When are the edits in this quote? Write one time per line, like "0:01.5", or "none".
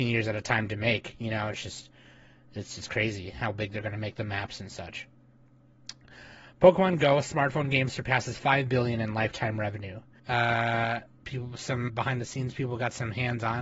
0:10.2
0:11.9